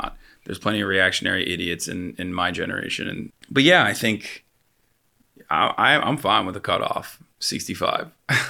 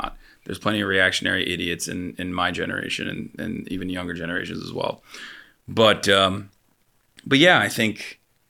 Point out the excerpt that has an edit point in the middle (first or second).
first